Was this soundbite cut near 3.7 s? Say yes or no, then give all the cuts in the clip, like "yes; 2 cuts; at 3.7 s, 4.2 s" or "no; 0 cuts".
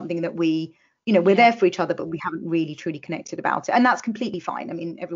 no; 0 cuts